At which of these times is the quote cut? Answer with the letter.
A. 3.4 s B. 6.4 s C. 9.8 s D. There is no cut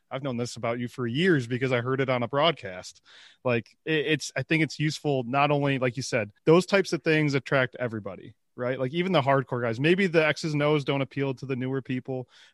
B